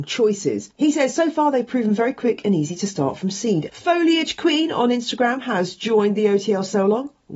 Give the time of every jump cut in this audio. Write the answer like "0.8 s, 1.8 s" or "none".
3.7 s

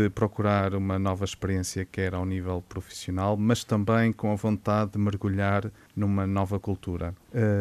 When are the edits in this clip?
none

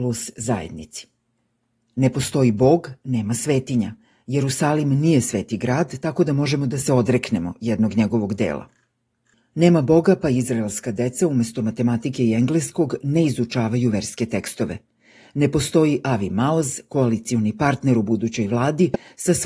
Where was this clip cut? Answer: none

